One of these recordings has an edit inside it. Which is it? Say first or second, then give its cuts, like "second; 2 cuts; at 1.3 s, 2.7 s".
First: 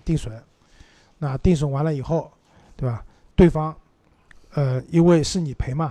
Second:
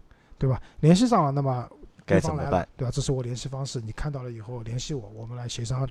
second; 1 cut; at 2.6 s